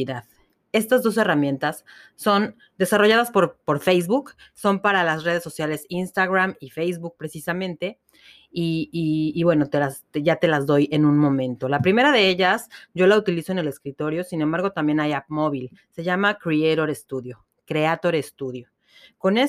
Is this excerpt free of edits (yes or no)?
yes